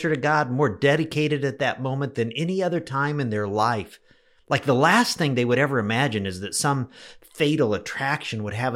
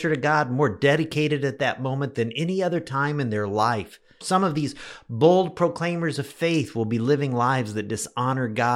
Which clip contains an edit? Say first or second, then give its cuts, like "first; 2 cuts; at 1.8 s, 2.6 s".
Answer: second; 1 cut; at 4.2 s